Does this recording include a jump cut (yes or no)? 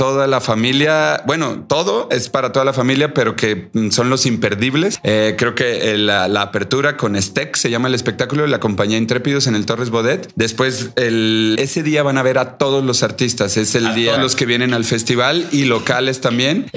yes